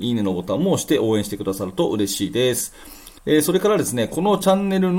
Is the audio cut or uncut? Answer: cut